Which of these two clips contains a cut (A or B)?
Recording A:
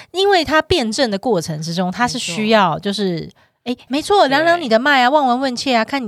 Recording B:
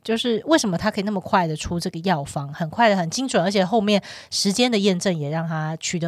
A